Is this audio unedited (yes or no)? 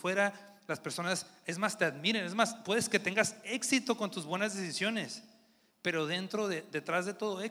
yes